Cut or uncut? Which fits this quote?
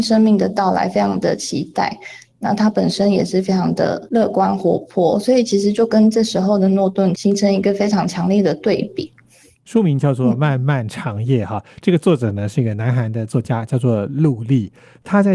uncut